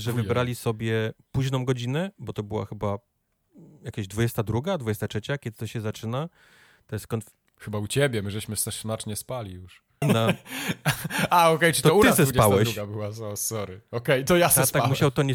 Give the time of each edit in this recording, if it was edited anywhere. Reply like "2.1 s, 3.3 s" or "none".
10.0 s